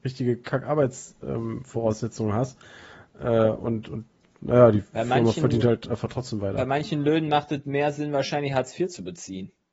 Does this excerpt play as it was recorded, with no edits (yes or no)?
yes